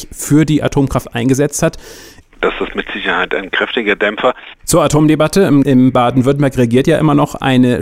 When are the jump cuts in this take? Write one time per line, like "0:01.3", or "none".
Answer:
0:02.2
0:04.5
0:05.6